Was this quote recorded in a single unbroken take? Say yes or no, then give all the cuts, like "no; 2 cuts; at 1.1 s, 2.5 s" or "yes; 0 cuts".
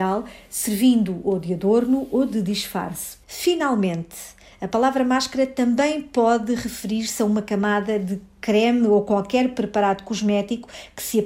no; 1 cut; at 3.2 s